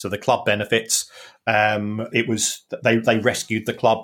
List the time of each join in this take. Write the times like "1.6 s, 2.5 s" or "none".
2.1 s